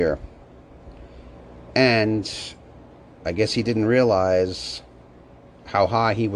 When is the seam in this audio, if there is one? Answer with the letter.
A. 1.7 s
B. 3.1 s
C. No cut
A